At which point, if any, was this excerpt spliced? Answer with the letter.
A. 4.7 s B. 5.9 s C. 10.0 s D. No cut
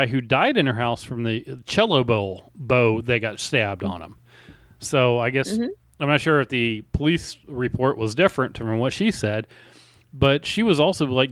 D